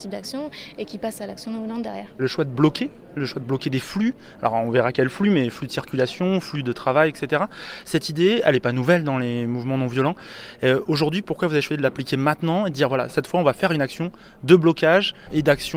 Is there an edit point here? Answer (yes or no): no